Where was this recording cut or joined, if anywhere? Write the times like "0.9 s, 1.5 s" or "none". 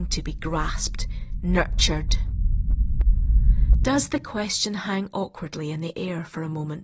1.4 s